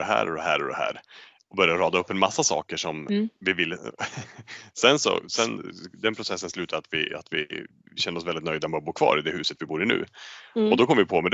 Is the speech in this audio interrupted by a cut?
no; 0 cuts

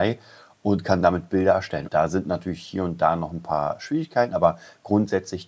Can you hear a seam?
yes; 2 cuts; at 1.9 s, 4.3 s

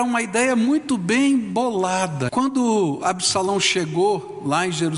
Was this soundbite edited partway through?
yes; 1 cut; at 2.3 s

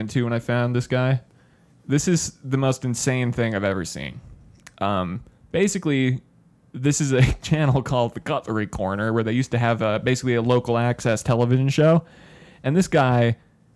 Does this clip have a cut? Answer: no; 0 cuts

